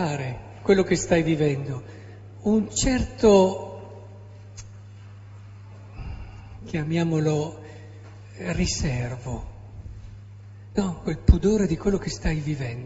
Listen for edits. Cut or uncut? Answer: uncut